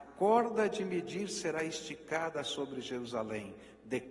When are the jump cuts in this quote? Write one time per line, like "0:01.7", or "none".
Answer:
none